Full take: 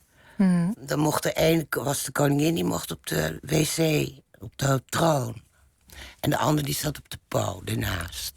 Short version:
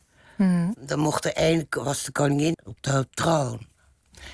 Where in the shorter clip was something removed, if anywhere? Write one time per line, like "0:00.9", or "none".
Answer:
0:02.5